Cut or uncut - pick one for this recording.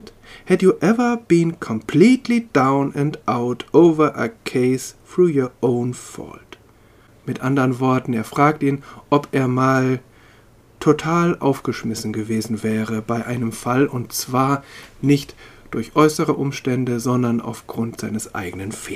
uncut